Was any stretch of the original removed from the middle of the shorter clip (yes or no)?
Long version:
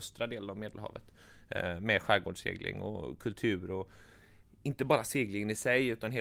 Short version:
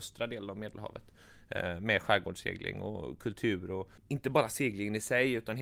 yes